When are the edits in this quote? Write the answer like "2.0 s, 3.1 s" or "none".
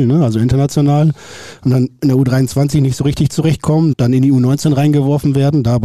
3.9 s